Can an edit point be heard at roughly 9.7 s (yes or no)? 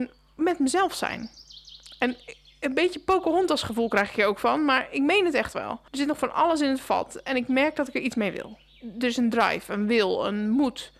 no